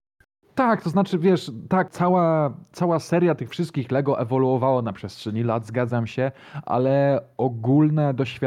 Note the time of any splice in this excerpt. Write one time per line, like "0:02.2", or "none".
none